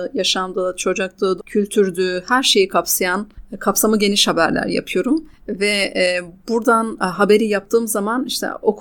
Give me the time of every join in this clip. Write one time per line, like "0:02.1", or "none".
0:01.4